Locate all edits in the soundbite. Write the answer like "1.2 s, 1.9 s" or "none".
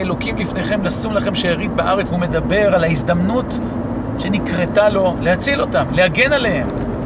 2.1 s, 5.9 s